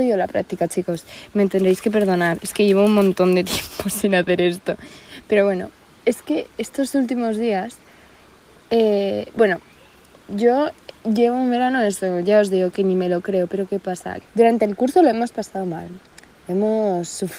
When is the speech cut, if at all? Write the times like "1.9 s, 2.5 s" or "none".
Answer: 6.5 s, 14.2 s